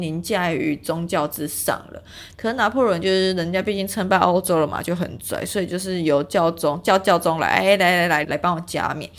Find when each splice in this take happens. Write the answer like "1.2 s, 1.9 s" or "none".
2.3 s, 8.2 s